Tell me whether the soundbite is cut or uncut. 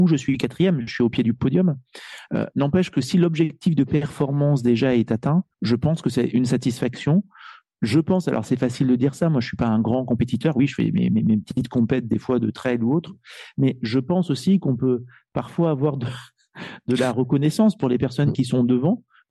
cut